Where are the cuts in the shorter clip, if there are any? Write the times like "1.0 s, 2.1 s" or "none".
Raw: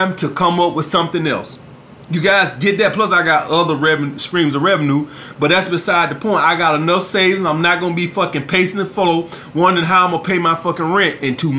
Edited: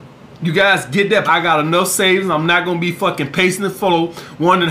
1.3 s